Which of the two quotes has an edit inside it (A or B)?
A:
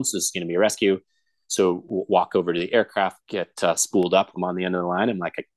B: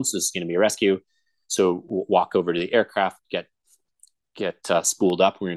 A